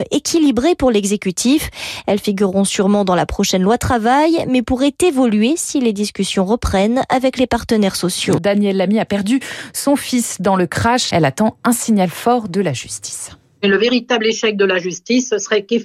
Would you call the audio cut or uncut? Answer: cut